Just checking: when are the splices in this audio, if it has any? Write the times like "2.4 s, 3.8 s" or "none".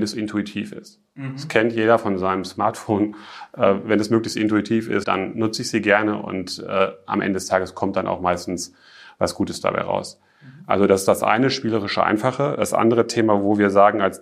5.0 s